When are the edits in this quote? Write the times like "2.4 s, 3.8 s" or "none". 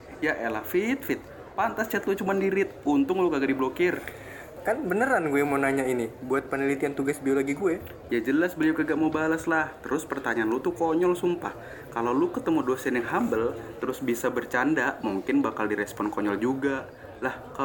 4.6 s, 8.1 s